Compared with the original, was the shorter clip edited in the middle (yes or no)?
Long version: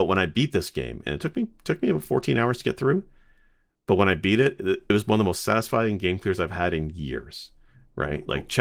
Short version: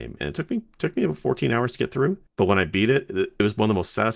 yes